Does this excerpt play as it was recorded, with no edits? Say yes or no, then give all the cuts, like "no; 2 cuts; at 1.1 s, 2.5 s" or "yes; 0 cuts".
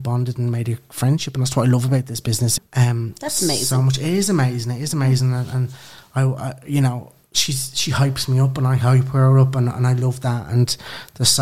no; 1 cut; at 2.6 s